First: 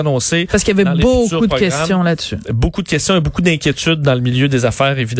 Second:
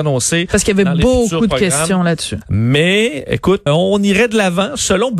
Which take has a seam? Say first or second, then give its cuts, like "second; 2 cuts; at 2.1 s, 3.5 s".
second; 2 cuts; at 2.4 s, 3.7 s